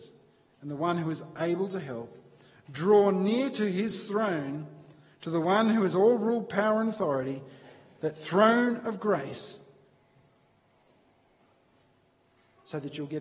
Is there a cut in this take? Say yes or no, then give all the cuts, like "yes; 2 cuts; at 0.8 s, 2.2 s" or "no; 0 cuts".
no; 0 cuts